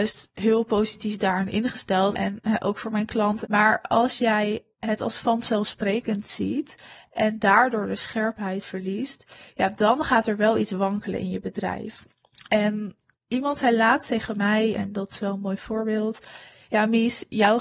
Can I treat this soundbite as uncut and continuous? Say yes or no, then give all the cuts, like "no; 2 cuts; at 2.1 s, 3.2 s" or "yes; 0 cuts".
no; 2 cuts; at 2.1 s, 3.4 s